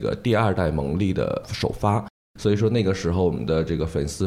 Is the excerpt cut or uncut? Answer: uncut